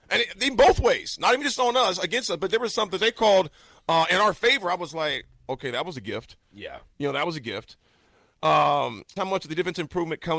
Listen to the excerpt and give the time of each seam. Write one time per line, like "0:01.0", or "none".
0:09.2